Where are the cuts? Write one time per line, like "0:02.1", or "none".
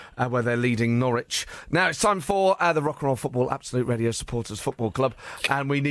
none